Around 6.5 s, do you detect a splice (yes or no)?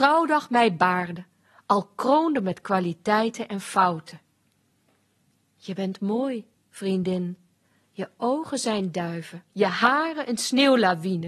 yes